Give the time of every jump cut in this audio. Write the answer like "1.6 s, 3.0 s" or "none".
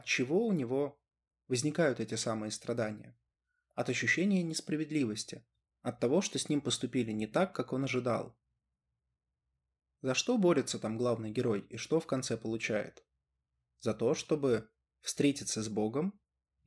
none